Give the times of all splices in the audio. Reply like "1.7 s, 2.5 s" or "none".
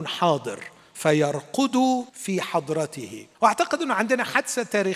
2.1 s, 3.3 s